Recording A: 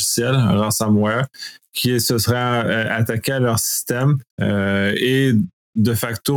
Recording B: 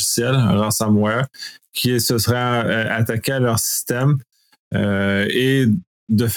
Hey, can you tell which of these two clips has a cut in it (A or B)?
A